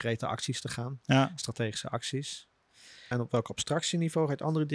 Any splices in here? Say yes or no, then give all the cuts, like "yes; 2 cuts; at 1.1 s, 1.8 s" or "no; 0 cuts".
yes; 1 cut; at 3.1 s